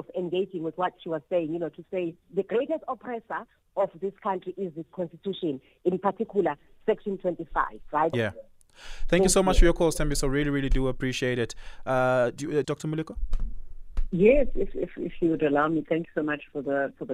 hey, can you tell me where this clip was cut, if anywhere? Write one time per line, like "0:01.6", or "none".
0:02.2
0:08.1
0:12.6